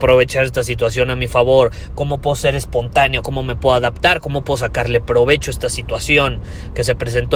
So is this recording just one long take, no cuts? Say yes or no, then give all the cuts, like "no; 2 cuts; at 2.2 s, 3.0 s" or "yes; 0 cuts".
yes; 0 cuts